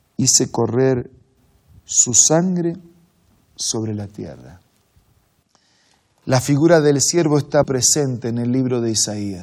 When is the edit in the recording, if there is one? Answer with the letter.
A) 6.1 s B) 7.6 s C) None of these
B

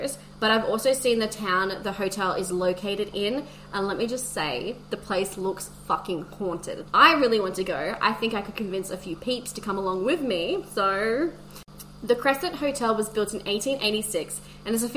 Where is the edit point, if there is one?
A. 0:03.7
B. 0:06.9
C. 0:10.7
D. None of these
B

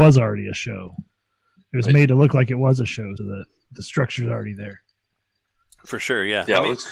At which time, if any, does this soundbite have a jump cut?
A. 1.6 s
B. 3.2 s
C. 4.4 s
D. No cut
B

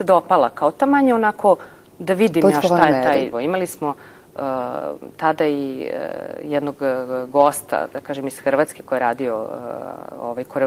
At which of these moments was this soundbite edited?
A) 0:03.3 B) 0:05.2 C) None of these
A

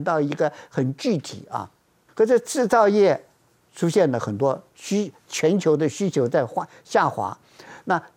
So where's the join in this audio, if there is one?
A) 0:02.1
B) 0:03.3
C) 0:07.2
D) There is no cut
A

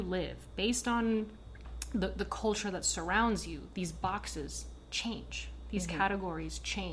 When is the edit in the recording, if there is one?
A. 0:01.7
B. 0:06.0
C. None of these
C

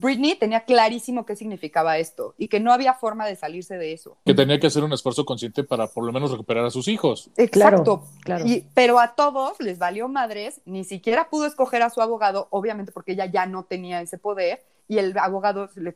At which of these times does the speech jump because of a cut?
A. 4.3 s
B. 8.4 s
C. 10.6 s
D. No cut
A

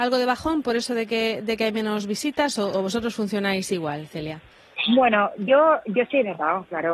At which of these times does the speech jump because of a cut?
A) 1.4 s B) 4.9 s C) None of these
C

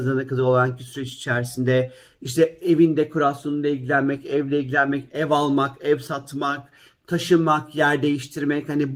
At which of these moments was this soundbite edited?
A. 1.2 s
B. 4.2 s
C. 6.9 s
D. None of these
D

